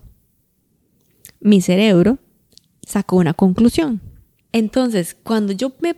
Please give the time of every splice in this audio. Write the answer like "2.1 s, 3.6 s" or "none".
4.4 s